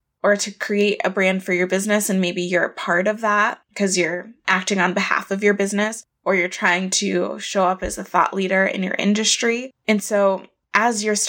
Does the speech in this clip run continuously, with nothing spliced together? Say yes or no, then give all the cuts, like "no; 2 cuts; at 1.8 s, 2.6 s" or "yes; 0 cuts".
yes; 0 cuts